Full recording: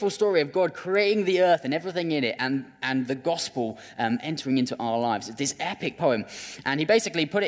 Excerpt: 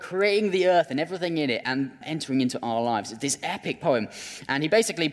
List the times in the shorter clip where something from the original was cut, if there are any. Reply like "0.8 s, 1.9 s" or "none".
2.0 s